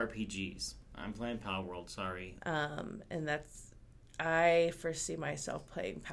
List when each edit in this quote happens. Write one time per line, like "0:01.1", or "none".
0:02.4